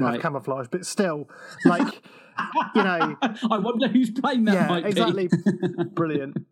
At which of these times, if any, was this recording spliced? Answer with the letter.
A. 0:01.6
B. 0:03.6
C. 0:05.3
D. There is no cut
C